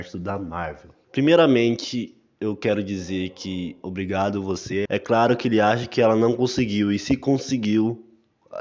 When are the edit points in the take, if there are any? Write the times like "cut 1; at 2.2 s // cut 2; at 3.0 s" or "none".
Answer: cut 1; at 1.0 s // cut 2; at 4.9 s